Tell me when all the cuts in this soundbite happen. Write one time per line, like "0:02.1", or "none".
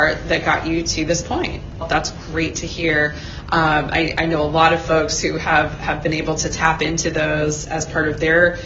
0:01.8